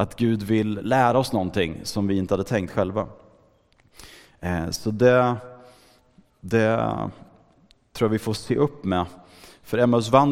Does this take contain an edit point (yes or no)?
no